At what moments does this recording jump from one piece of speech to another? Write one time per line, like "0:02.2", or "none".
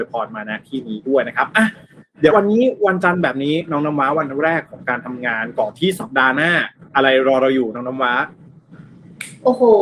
0:02.3